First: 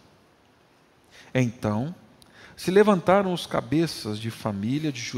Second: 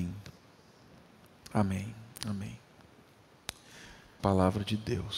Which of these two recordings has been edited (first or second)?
second